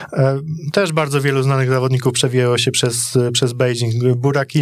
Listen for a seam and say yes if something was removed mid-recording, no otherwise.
no